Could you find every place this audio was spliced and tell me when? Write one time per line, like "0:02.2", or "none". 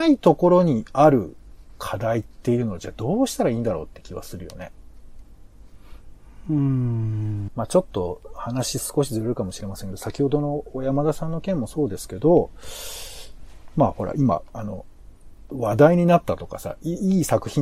0:07.5